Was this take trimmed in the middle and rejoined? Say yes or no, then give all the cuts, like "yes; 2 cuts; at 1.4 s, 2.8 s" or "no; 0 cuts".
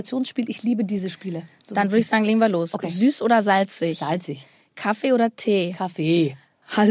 no; 0 cuts